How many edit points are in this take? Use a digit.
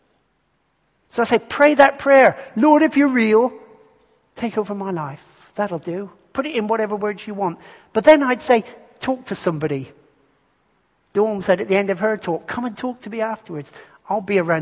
0